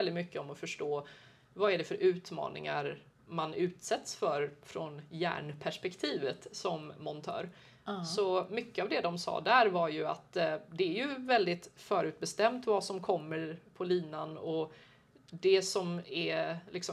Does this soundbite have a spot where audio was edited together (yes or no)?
no